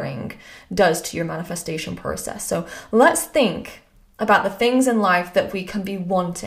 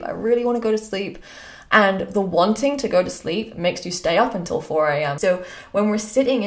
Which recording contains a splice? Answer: second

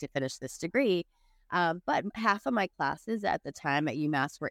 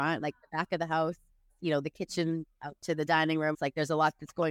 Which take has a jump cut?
second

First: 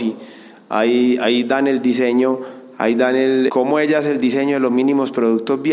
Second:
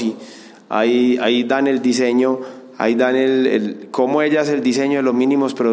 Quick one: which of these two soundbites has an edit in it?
first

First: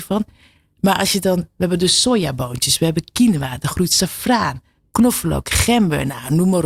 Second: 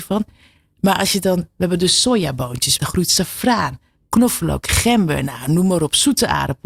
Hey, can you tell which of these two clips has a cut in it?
second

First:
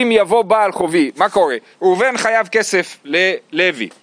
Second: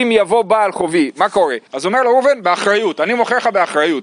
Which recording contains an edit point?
second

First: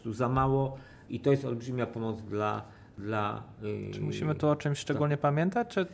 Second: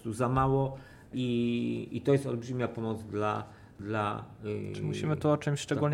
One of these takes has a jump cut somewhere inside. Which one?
first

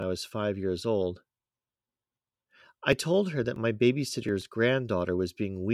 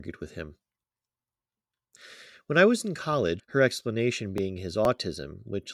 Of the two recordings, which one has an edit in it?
second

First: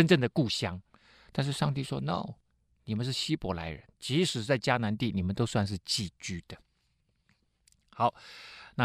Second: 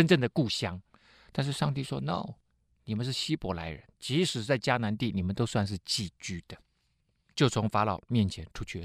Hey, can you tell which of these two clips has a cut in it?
second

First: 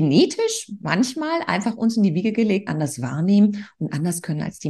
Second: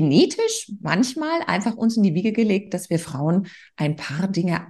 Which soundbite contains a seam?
first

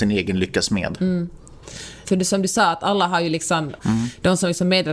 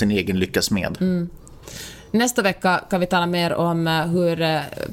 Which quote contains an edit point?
first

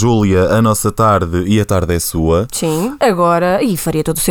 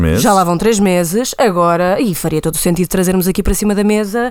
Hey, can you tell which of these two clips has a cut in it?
first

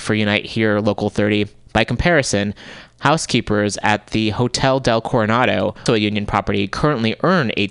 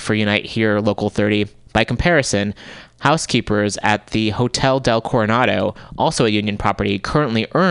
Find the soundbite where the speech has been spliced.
first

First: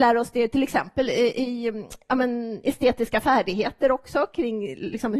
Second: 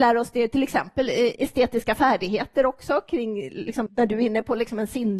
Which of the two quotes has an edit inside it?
second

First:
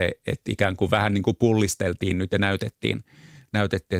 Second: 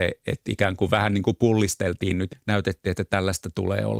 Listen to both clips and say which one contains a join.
second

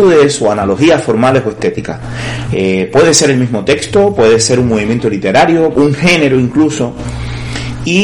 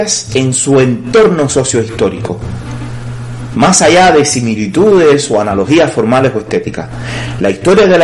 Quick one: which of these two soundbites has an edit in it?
first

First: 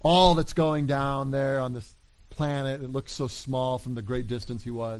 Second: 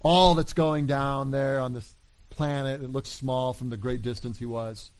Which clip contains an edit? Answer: second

